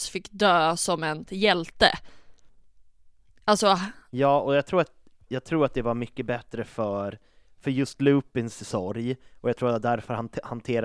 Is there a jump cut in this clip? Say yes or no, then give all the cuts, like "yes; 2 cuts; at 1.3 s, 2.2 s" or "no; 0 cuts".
yes; 1 cut; at 1.3 s